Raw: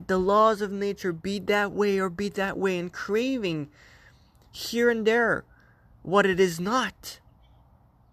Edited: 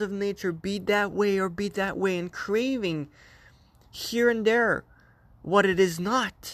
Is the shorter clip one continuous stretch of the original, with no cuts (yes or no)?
yes